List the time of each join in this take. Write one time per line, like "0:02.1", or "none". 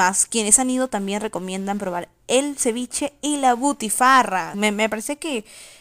0:04.5